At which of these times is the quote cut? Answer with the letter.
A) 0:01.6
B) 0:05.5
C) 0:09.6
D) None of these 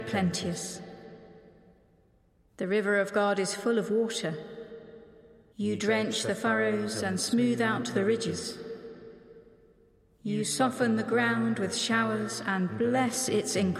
B